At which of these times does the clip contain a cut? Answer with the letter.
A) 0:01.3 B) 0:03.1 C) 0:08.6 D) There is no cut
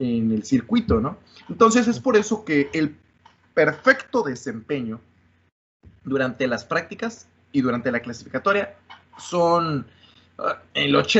D